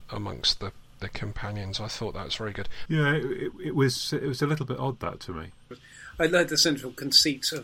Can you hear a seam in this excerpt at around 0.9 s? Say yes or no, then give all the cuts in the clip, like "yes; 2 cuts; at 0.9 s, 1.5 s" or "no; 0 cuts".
no; 2 cuts; at 2.9 s, 5.7 s